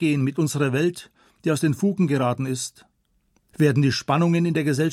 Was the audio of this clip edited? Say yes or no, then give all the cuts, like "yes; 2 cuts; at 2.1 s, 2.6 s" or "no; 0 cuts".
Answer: yes; 1 cut; at 3.5 s